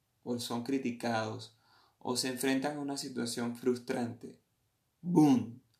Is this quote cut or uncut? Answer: uncut